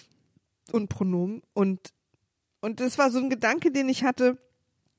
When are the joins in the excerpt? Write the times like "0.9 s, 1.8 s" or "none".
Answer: none